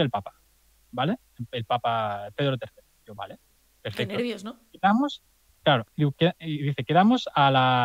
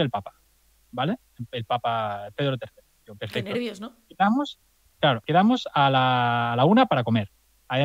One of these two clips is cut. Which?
second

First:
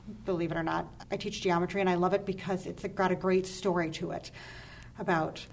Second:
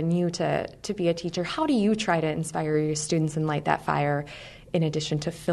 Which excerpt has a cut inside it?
first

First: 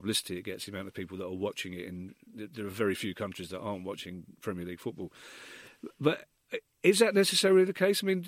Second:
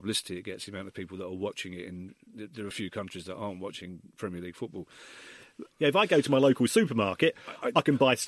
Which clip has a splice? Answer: second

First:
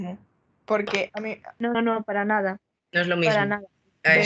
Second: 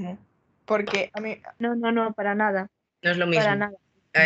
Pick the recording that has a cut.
first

